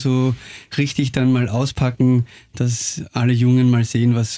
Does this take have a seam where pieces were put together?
no; 0 cuts

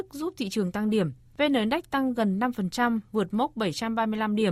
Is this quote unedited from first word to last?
yes; 0 cuts

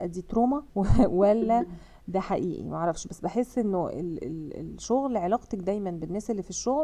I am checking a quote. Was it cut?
no; 0 cuts

